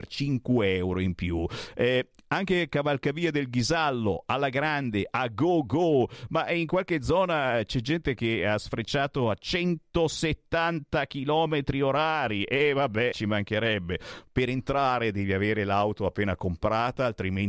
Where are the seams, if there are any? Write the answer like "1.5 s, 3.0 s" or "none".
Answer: 13.1 s, 14.3 s